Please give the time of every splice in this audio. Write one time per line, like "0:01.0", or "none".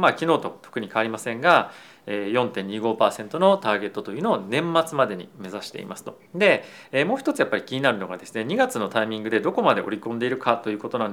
0:06.2